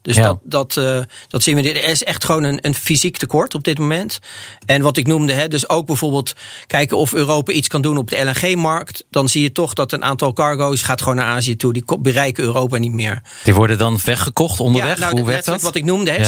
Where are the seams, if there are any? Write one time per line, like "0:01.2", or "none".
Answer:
0:10.8
0:15.1